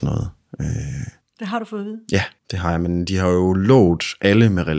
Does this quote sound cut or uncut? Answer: cut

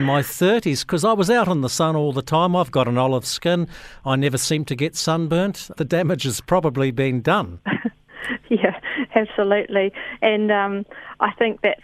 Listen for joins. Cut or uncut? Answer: uncut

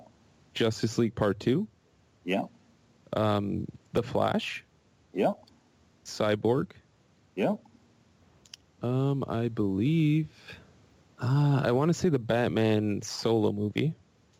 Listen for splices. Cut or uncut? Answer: uncut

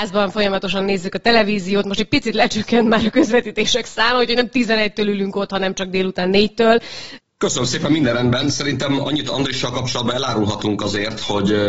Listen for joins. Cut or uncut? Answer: cut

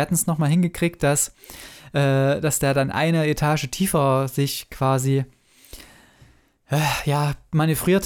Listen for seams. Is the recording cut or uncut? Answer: uncut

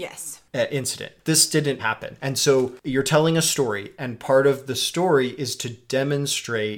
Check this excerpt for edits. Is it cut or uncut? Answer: cut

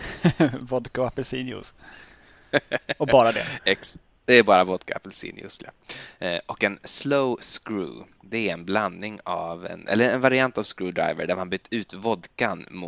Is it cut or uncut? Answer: uncut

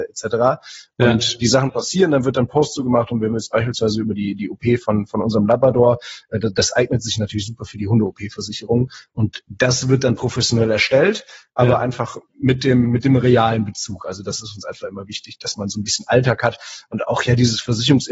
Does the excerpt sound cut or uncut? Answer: uncut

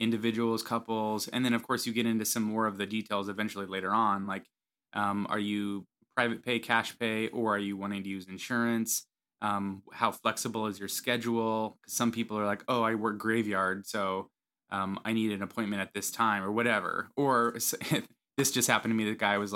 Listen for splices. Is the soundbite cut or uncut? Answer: uncut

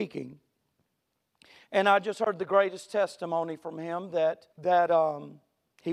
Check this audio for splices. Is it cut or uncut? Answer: cut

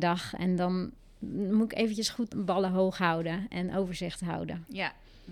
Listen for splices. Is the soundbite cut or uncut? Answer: cut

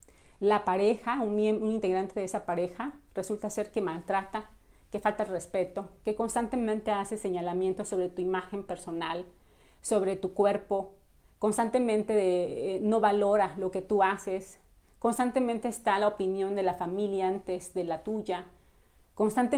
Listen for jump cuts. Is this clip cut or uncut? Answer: uncut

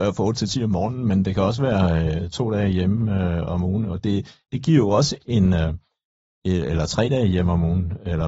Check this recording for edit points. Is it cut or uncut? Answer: uncut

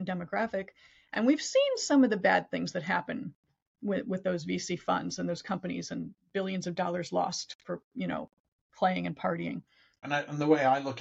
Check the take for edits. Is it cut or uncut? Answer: cut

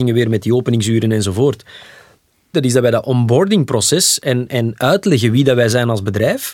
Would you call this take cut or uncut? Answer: cut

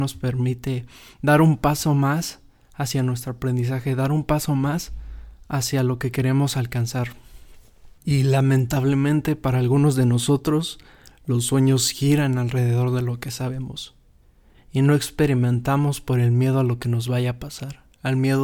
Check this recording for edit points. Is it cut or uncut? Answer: uncut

